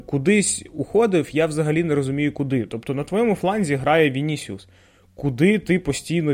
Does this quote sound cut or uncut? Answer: uncut